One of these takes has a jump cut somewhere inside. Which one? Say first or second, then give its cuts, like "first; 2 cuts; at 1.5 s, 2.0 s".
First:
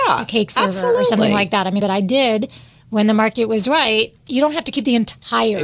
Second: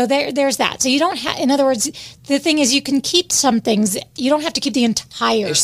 first; 2 cuts; at 1.8 s, 4.2 s